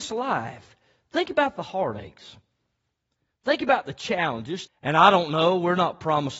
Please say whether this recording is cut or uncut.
cut